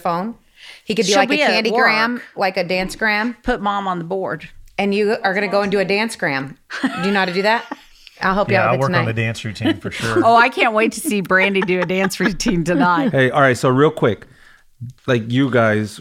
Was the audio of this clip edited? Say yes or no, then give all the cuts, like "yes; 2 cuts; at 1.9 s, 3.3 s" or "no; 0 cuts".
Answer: yes; 1 cut; at 15.0 s